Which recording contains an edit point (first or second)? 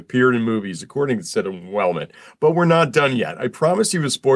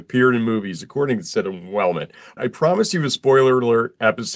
second